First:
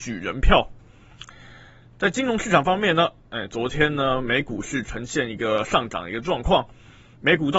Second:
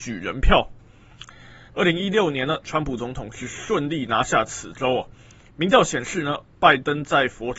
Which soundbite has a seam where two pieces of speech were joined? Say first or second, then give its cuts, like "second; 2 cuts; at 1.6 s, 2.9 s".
second; 1 cut; at 1.7 s